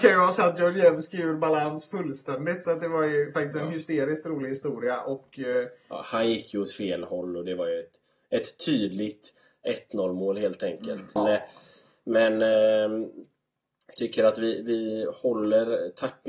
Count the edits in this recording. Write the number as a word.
one